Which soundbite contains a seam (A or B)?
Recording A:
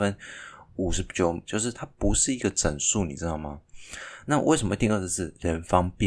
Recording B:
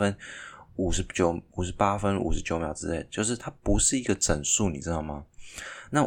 A